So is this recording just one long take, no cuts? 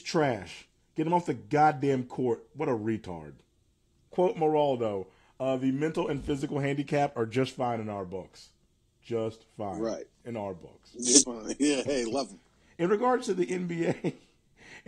no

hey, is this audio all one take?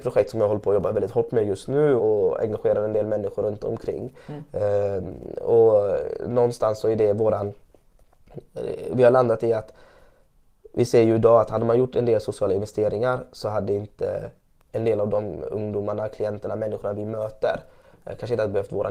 no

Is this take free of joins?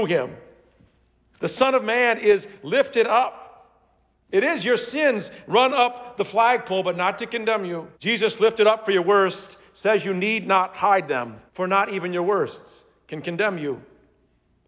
no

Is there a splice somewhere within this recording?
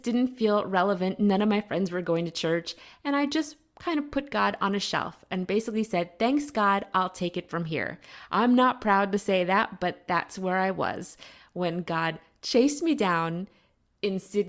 no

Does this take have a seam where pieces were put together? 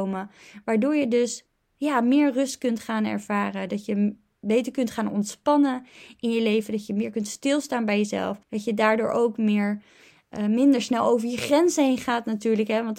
yes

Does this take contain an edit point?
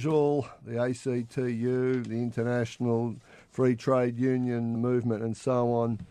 yes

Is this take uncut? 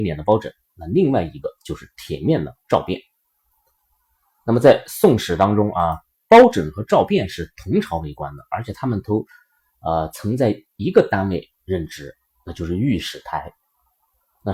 yes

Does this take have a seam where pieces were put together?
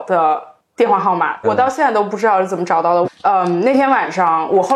yes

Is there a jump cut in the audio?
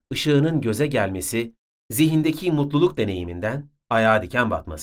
no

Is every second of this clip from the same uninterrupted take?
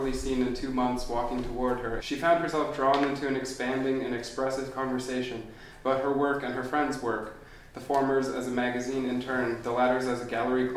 no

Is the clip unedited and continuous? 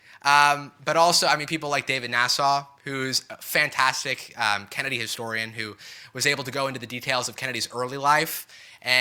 yes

